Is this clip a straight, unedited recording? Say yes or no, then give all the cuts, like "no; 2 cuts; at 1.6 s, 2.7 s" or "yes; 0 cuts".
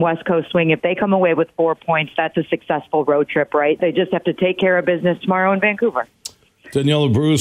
no; 1 cut; at 3.8 s